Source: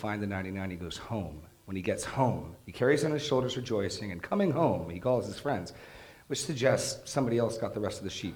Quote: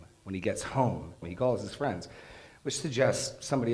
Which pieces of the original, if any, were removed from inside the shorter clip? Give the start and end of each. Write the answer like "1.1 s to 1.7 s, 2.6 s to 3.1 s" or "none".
2.6 s to 4.9 s